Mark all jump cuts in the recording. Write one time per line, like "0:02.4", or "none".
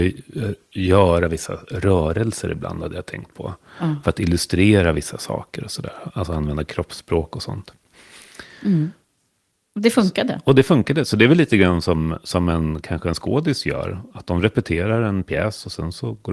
none